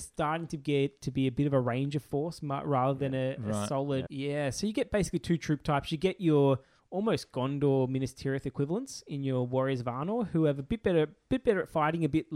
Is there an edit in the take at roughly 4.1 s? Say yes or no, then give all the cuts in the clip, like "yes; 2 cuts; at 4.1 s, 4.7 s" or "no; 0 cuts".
yes; 1 cut; at 4.1 s